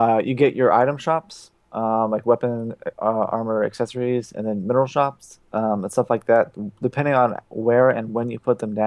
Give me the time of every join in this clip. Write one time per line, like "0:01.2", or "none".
none